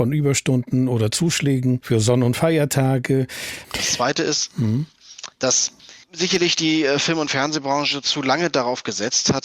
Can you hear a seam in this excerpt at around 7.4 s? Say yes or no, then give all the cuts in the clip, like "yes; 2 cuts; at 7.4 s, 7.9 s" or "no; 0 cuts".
no; 1 cut; at 3.6 s